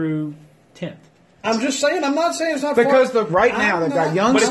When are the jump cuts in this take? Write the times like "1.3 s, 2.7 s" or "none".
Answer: 1.4 s, 3.3 s